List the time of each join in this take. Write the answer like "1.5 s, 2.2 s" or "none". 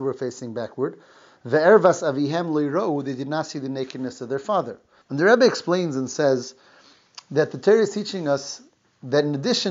5.0 s